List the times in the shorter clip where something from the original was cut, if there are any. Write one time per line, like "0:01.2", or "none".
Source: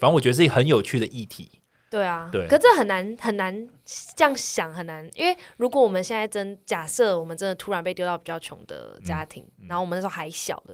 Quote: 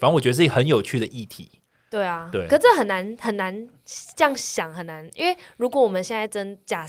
none